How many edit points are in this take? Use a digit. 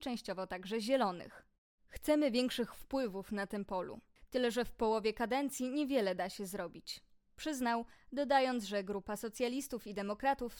1